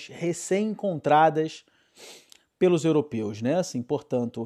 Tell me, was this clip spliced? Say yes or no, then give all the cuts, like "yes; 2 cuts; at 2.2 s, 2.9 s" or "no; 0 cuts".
no; 0 cuts